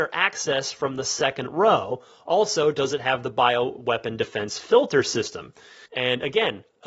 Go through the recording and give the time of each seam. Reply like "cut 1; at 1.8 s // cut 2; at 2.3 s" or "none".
cut 1; at 5.9 s